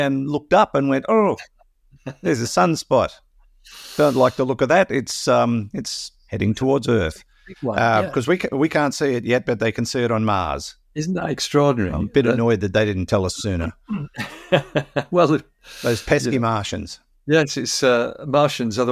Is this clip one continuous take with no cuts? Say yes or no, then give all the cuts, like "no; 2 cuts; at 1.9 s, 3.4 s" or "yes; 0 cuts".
yes; 0 cuts